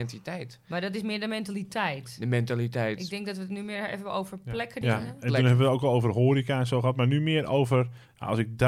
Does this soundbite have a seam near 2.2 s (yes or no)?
no